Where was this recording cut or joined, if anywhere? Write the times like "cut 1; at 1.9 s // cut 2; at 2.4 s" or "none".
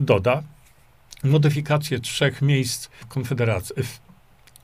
cut 1; at 3.0 s